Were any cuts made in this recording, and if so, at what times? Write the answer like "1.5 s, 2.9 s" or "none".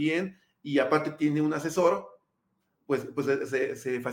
none